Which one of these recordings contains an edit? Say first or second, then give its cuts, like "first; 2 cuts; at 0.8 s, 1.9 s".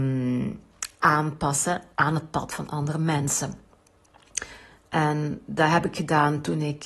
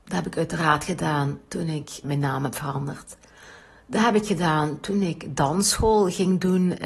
second; 1 cut; at 2.0 s